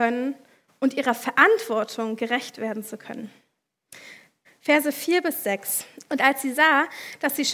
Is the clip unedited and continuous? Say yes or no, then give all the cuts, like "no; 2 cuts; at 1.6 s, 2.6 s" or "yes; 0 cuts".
no; 2 cuts; at 4.4 s, 6.1 s